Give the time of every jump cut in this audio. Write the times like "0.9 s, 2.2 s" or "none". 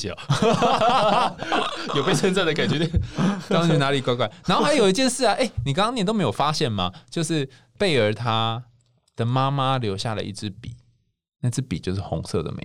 none